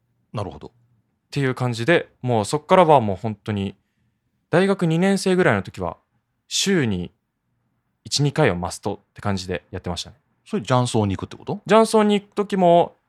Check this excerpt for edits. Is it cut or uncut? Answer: uncut